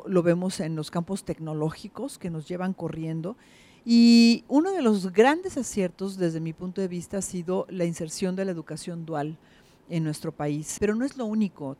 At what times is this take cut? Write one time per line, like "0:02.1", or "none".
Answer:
0:10.8